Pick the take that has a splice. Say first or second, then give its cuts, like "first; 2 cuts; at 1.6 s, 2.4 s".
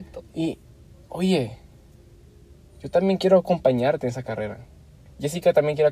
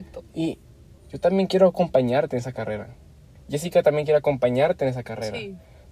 second; 1 cut; at 1.0 s